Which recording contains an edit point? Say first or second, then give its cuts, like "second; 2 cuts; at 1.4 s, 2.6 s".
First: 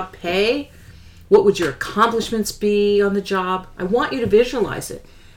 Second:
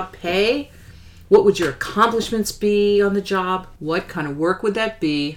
second; 1 cut; at 3.8 s